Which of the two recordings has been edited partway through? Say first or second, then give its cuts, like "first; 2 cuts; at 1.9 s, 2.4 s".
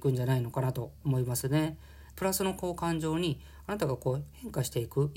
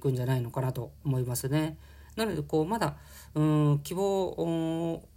first; 1 cut; at 2.1 s